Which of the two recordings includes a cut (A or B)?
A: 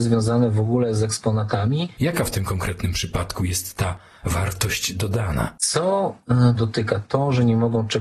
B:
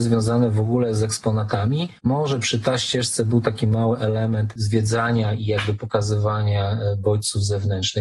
A